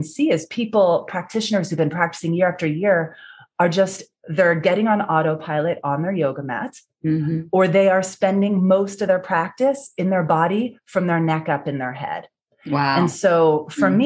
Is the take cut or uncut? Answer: uncut